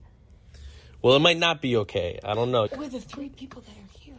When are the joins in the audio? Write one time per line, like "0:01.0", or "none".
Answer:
0:02.7

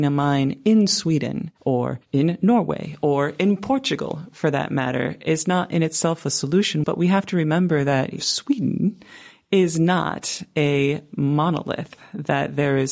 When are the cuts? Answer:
0:06.8

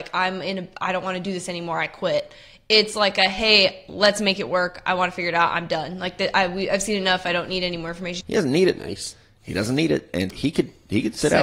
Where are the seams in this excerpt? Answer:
0:08.2
0:10.3

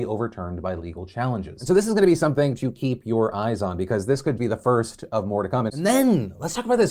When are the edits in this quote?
0:04.4
0:05.7

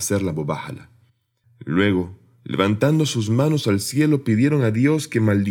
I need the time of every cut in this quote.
0:01.4

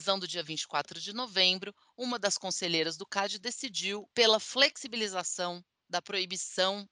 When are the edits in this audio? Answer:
0:04.1

